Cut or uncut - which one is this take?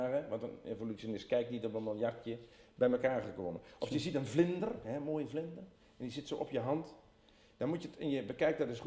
uncut